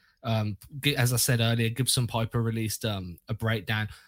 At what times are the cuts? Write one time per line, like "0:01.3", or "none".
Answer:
none